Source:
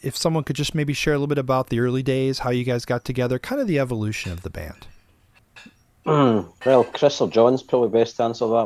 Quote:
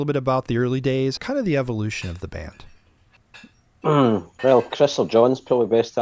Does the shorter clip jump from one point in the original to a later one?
yes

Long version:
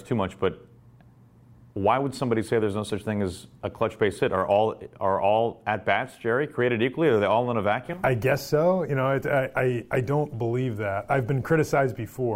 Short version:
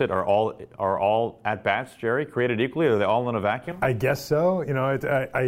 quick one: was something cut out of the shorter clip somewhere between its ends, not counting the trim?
no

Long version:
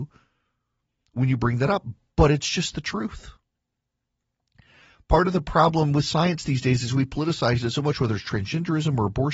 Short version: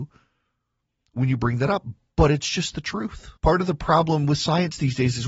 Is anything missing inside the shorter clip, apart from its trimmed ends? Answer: yes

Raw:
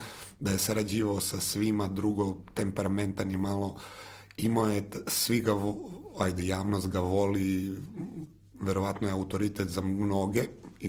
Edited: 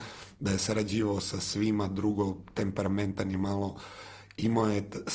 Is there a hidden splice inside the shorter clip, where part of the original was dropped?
no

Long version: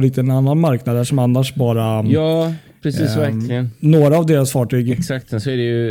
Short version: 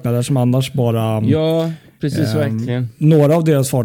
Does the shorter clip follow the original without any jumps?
yes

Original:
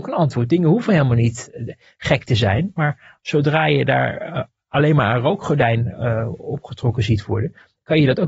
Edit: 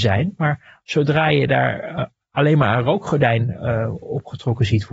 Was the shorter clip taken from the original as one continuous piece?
yes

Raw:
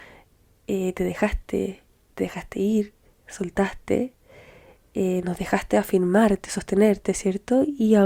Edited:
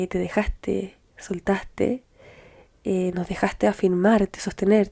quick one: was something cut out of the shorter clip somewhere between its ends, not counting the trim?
yes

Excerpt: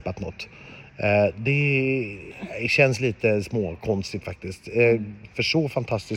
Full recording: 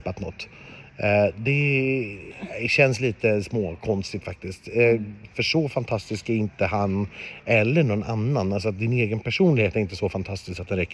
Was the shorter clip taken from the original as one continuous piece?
yes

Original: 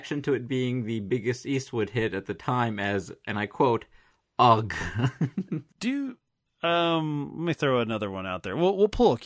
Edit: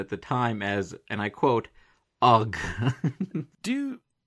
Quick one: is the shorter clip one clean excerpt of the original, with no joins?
yes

